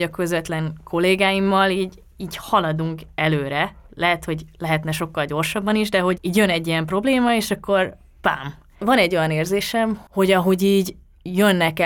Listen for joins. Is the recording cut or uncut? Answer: cut